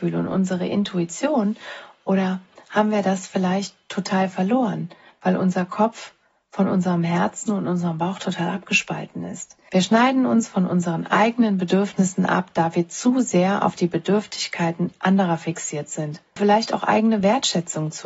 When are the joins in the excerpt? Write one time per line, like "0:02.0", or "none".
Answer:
0:09.6
0:16.4